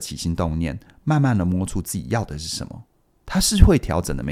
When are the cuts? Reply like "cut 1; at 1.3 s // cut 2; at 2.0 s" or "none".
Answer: none